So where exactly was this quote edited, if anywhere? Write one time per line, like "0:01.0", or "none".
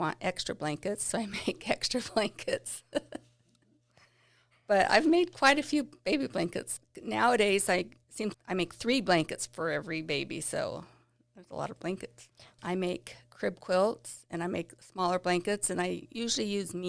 0:08.3
0:12.6